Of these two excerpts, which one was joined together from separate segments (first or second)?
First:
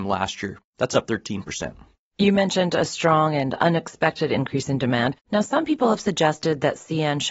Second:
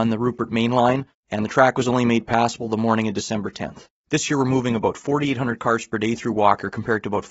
second